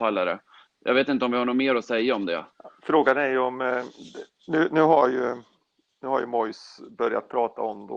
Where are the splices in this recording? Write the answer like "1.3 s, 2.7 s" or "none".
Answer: none